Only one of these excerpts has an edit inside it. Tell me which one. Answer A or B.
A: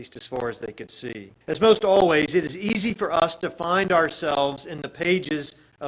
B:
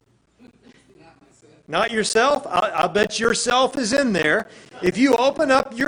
A